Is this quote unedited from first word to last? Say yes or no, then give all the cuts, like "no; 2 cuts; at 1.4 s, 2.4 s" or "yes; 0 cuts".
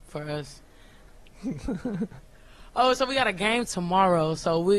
no; 1 cut; at 1.1 s